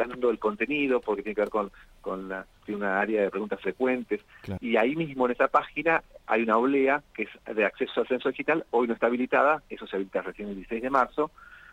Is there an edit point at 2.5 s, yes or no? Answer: yes